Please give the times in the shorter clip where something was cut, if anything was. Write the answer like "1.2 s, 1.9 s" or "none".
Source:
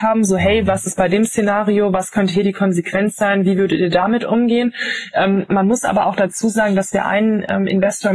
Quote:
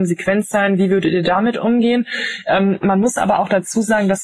none